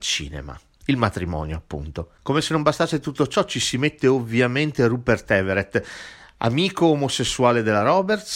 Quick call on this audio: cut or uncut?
uncut